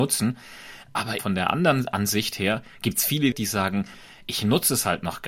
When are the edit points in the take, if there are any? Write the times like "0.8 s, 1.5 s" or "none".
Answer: 1.2 s, 3.3 s